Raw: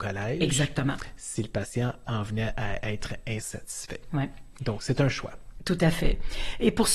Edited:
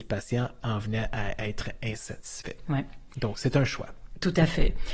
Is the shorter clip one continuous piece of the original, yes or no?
yes